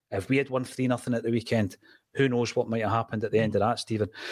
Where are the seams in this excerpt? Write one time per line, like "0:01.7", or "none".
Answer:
none